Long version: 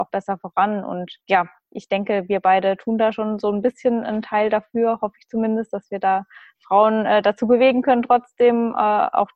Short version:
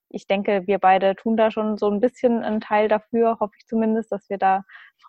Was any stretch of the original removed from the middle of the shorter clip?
no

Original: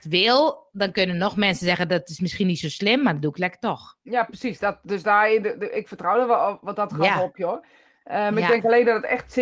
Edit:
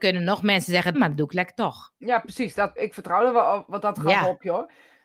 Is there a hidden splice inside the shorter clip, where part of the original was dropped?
yes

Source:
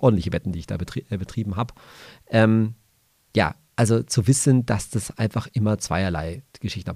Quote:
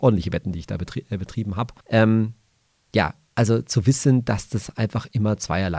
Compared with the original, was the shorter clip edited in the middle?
yes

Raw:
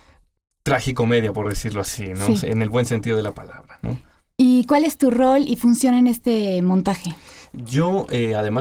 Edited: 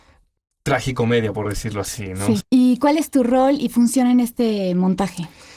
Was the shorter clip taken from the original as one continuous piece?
no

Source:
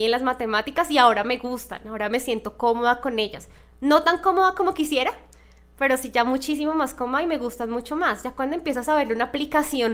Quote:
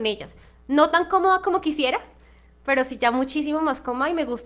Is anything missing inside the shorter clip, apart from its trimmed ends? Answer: no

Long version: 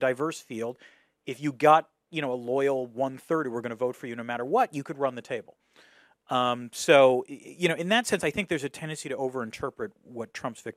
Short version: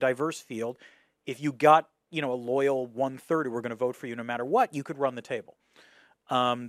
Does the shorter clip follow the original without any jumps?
yes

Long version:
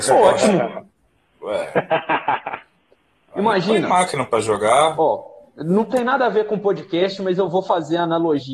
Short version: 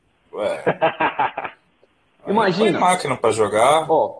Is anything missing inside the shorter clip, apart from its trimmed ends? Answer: no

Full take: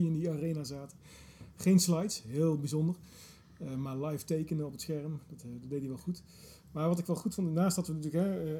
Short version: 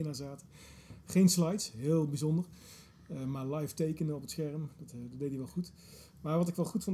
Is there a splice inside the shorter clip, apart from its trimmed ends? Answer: no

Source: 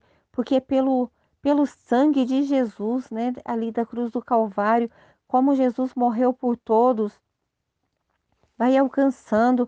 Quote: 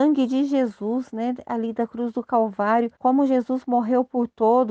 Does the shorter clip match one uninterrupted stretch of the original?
no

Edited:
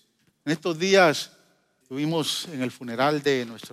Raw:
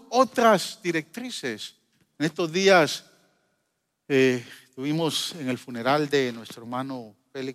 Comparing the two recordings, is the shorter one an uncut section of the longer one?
no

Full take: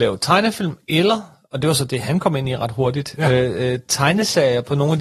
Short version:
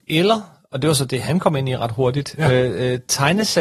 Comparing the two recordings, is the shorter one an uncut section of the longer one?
yes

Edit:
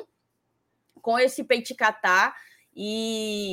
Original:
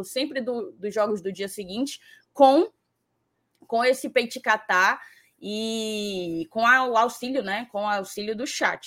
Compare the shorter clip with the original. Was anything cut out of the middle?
no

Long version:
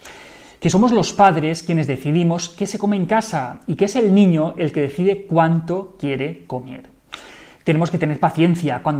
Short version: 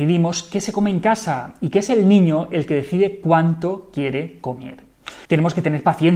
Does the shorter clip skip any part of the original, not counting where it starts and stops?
yes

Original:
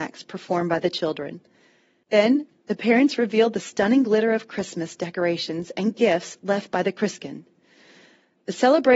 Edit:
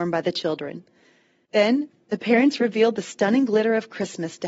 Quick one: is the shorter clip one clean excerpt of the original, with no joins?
yes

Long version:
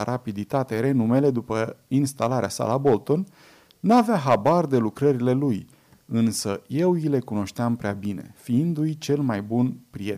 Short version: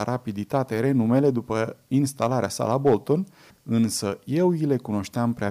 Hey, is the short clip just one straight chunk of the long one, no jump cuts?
no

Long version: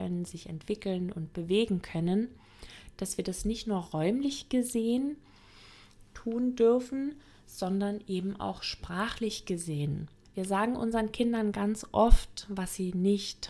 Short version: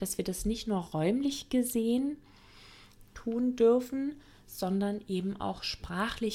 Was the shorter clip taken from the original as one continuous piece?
yes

